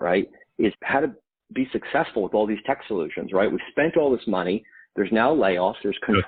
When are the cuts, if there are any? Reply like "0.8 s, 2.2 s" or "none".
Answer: none

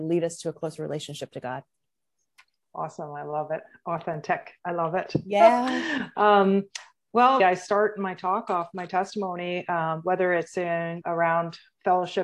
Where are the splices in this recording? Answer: 7.4 s, 11.0 s

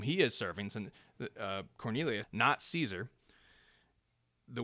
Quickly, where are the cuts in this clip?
2.2 s

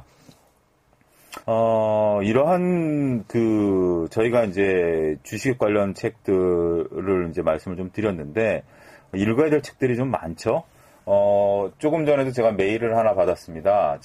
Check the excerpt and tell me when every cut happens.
1.4 s

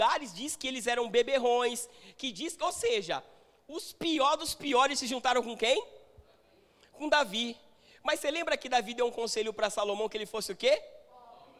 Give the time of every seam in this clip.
none

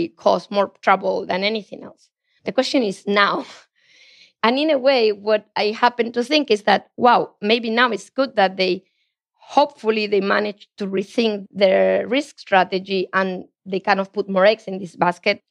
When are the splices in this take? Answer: none

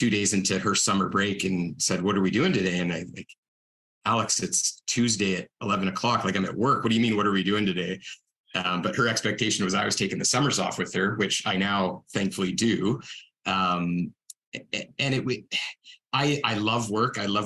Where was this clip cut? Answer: none

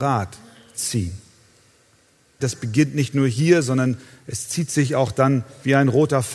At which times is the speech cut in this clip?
2.4 s

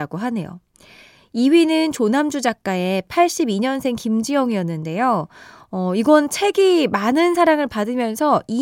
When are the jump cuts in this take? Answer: none

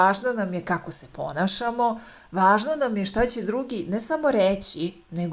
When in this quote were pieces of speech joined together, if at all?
none

